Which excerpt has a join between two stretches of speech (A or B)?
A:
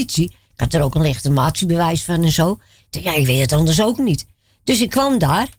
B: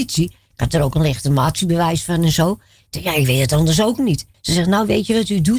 B